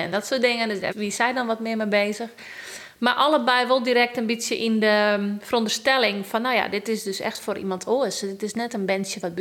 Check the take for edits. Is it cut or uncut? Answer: cut